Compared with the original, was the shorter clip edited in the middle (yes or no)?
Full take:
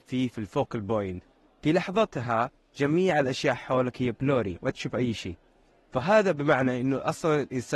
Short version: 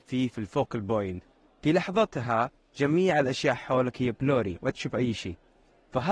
no